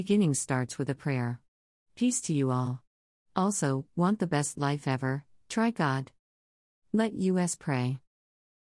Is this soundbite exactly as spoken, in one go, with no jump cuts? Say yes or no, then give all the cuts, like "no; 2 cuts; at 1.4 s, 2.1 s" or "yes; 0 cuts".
yes; 0 cuts